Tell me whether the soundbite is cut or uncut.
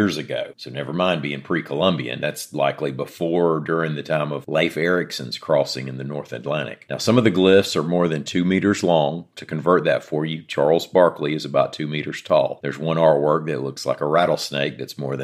uncut